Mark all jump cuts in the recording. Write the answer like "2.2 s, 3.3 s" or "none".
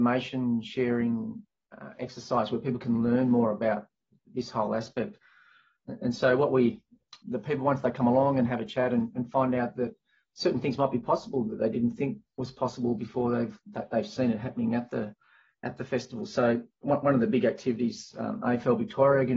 7.2 s